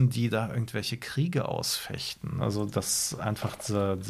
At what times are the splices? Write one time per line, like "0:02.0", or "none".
0:02.4